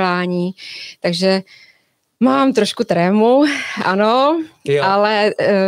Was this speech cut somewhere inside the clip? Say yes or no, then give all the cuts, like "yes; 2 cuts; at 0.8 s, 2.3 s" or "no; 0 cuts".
no; 0 cuts